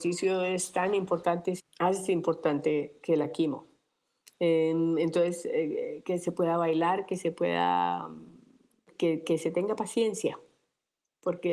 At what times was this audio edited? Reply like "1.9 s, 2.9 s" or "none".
1.6 s